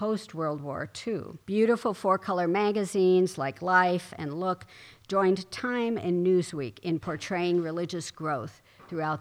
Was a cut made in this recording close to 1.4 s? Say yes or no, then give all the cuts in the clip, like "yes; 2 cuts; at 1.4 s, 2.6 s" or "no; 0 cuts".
yes; 1 cut; at 1.4 s